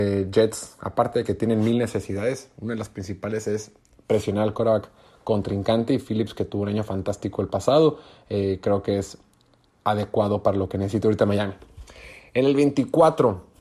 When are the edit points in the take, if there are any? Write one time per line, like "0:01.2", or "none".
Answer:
none